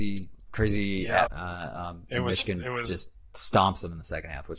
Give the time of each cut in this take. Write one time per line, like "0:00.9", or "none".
0:01.3